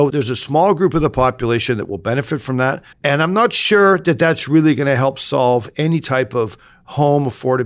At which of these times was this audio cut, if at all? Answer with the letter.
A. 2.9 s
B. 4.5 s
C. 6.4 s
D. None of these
A